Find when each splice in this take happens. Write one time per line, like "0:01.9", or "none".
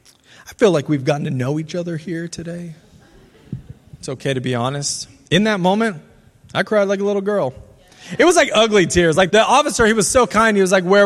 0:09.3